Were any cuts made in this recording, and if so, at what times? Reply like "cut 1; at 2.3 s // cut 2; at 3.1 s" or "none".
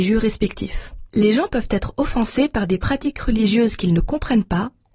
cut 1; at 1.1 s